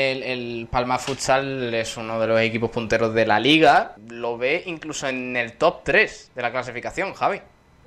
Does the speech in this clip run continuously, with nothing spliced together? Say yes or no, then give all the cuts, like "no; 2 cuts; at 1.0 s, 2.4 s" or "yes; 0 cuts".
no; 1 cut; at 4.0 s